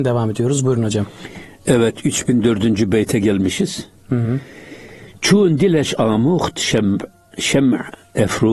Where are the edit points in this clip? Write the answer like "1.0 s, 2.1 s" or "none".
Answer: none